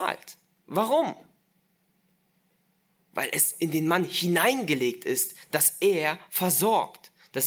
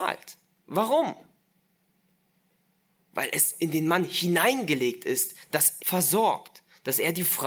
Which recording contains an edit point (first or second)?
second